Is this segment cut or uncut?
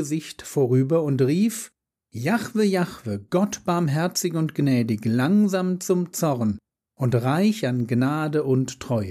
uncut